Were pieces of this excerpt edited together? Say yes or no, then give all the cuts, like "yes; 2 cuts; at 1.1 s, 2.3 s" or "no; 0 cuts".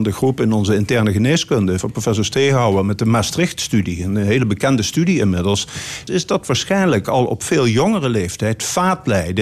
yes; 2 cuts; at 1.8 s, 6.1 s